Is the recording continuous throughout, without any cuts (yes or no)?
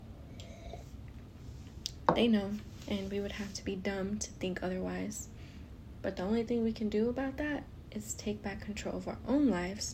yes